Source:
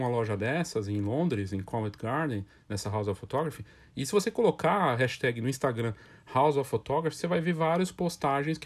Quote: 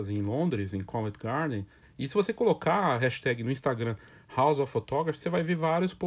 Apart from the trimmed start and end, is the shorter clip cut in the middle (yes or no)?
yes